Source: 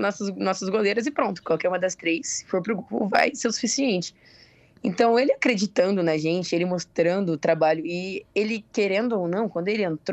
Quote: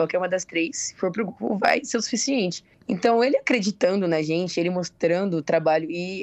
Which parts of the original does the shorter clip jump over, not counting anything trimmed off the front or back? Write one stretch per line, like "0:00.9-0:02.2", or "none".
0:04.2-0:04.7